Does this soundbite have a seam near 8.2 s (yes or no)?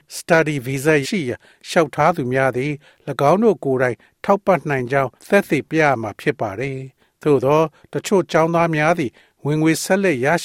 no